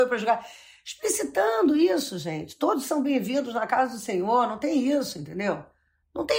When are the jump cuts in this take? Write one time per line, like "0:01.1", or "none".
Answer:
none